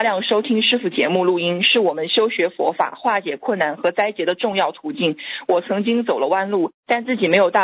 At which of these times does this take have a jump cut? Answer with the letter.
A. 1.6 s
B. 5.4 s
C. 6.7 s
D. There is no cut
C